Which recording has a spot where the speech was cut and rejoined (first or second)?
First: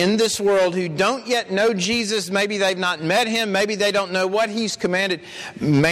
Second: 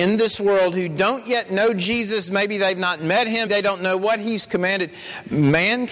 second